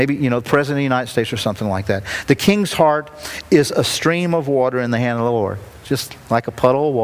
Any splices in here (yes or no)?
no